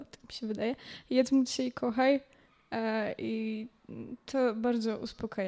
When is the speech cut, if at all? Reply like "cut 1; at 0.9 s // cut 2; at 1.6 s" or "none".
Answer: none